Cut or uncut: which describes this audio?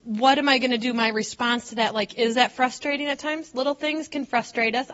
uncut